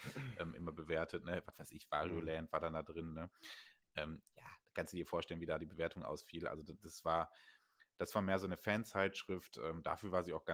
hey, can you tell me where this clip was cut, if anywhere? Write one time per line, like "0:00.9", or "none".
none